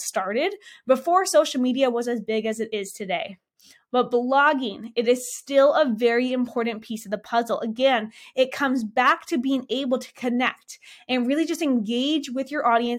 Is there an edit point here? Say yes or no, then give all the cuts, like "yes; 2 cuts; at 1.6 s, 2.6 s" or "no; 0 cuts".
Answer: no; 0 cuts